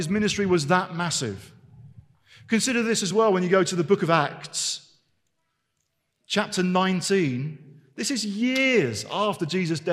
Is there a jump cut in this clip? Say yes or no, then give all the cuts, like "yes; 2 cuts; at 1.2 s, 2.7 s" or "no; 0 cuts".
no; 0 cuts